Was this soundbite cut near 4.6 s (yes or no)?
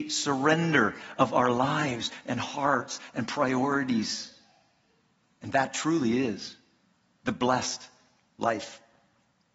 no